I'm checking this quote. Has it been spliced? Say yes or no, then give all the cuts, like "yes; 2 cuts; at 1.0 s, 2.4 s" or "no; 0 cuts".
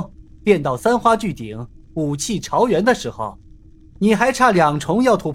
no; 0 cuts